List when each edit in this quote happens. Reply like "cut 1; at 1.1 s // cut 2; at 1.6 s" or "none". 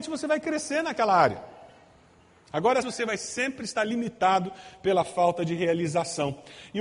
cut 1; at 2.8 s